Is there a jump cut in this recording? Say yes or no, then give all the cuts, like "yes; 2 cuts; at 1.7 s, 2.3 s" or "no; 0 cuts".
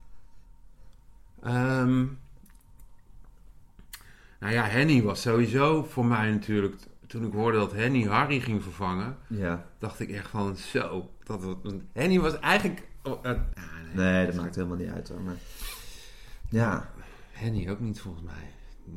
yes; 1 cut; at 13.5 s